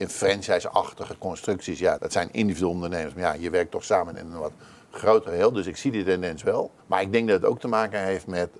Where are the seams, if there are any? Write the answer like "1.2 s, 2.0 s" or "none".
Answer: 2.0 s, 6.8 s